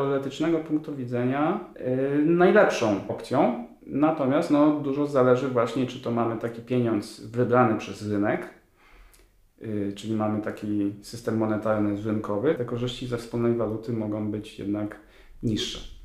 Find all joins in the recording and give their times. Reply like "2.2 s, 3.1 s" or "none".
12.6 s